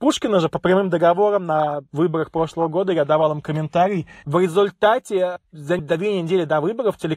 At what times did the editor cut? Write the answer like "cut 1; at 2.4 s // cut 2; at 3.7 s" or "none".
cut 1; at 4.2 s